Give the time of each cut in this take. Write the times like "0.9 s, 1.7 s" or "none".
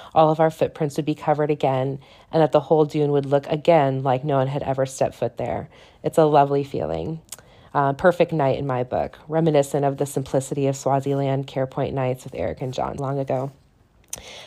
7.7 s, 13.0 s